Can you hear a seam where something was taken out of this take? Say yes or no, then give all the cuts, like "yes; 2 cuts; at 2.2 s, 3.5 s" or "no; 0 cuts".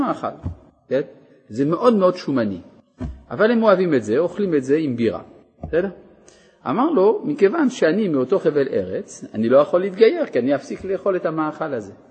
no; 0 cuts